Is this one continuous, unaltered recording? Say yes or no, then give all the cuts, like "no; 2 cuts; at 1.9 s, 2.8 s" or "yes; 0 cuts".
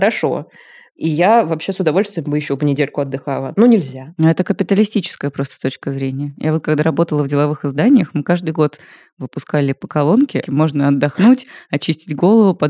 no; 1 cut; at 10.4 s